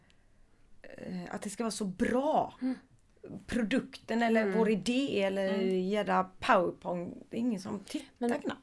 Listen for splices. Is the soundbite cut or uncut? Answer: uncut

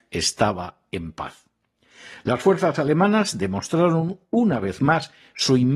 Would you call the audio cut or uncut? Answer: uncut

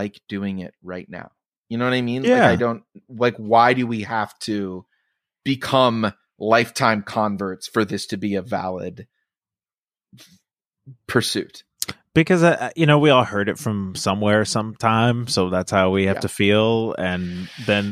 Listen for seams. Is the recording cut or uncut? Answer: uncut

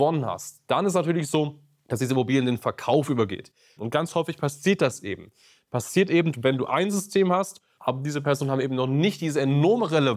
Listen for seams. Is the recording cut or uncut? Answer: cut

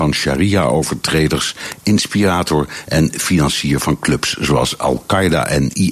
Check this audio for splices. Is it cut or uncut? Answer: uncut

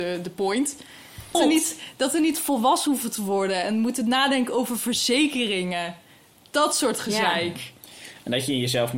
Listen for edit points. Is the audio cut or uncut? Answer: cut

